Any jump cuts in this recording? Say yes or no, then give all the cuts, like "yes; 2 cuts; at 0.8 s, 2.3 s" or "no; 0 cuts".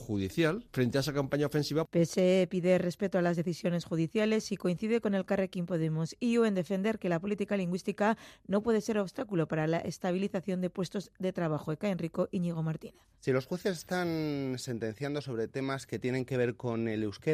no; 0 cuts